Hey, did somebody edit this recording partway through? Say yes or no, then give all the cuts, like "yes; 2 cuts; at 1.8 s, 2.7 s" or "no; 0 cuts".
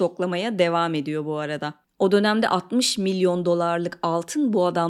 no; 0 cuts